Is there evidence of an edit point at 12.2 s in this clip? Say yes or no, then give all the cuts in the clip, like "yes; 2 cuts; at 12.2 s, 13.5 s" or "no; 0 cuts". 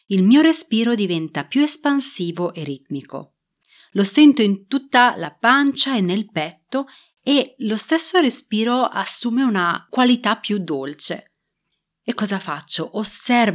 yes; 1 cut; at 12.2 s